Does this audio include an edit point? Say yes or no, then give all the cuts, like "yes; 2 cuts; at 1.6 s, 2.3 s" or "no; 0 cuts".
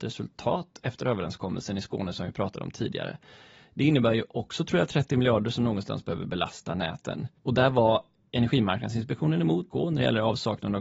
yes; 2 cuts; at 7.4 s, 9.7 s